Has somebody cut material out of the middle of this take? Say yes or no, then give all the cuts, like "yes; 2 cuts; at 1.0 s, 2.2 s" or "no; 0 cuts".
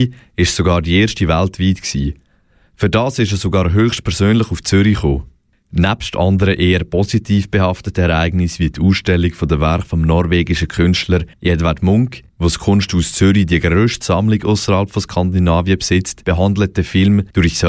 no; 0 cuts